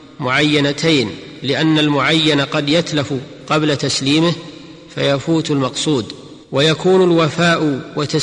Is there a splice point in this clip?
yes; 1 cut; at 6.4 s

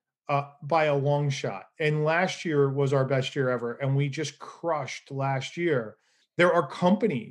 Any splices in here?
yes; 1 cut; at 6.2 s

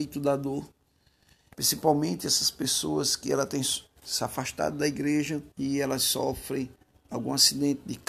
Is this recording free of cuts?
no; 2 cuts; at 1.5 s, 5.5 s

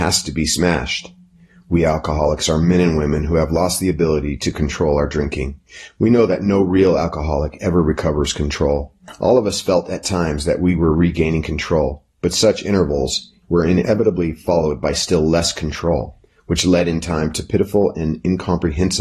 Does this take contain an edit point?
yes; 1 cut; at 13.4 s

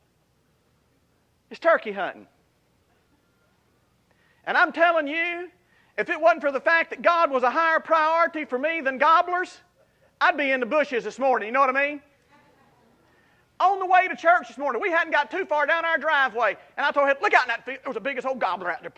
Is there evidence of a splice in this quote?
no; 0 cuts

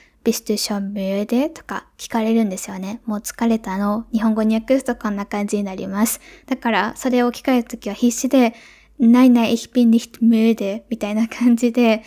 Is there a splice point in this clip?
no; 0 cuts

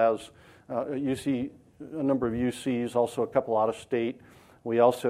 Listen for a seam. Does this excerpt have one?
no; 0 cuts

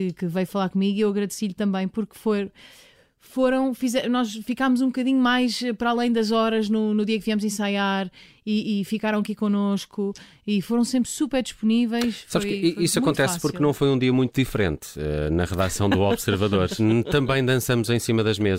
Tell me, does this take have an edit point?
no; 0 cuts

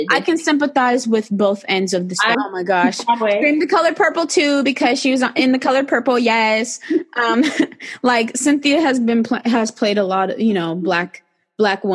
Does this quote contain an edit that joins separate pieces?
yes; 1 cut; at 2.3 s

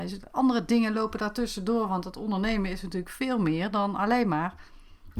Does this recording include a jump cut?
no; 0 cuts

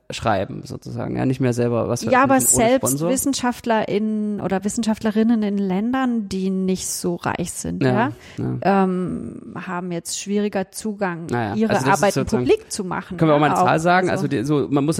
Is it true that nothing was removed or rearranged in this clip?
yes; 0 cuts

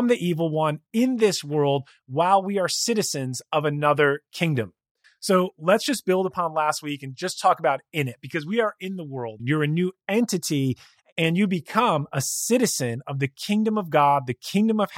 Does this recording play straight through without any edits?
no; 2 cuts; at 5.0 s, 9.4 s

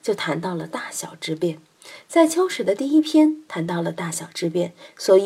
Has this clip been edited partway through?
no; 0 cuts

